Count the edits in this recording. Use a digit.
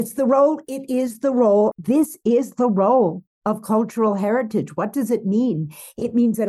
1